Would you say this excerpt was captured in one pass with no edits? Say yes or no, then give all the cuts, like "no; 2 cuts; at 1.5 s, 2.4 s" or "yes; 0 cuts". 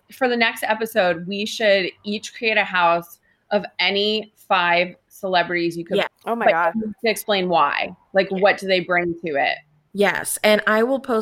no; 1 cut; at 6.1 s